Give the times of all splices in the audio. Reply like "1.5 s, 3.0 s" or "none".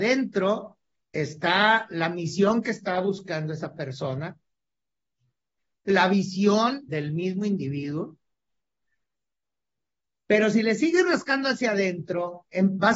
6.9 s